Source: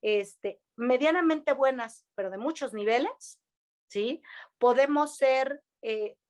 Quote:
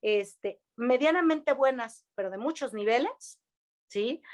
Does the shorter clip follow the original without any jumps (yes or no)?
yes